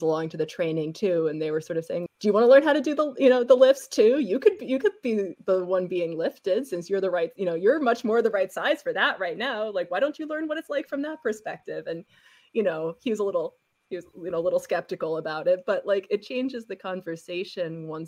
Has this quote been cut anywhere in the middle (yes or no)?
yes